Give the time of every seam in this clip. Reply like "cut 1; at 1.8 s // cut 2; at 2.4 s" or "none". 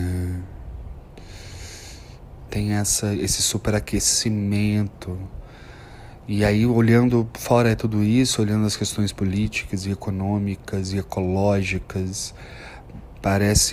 cut 1; at 2.5 s